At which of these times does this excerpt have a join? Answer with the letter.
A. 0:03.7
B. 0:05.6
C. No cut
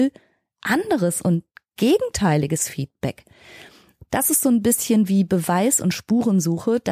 C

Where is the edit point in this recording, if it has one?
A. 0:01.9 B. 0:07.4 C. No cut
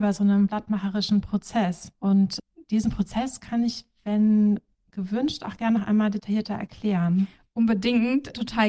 A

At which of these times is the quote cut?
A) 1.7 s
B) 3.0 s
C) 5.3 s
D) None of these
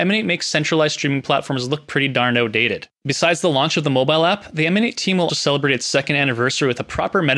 C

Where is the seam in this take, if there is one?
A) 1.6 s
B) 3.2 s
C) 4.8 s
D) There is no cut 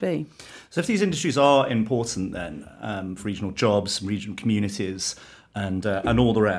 B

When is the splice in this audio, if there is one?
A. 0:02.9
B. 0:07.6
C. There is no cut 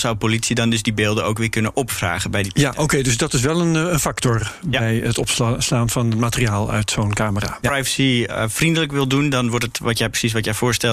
B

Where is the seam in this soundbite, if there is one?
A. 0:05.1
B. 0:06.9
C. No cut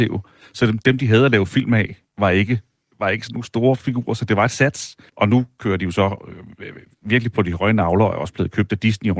A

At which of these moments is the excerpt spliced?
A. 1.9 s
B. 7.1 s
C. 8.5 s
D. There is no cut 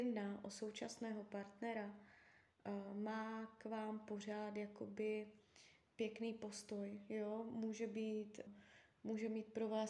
C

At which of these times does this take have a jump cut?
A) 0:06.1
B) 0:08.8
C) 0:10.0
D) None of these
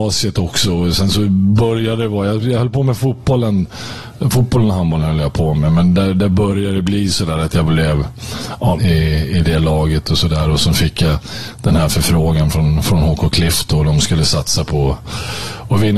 B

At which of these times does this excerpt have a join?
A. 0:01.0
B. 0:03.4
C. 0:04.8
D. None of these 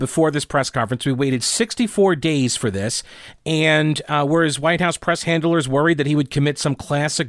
D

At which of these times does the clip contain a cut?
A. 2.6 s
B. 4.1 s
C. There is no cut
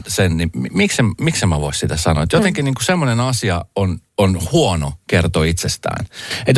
B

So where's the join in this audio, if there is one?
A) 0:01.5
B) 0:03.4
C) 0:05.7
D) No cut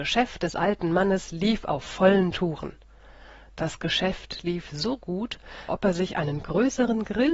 C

